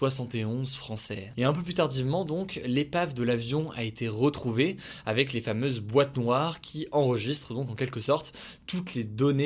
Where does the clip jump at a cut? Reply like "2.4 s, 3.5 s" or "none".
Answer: 1.3 s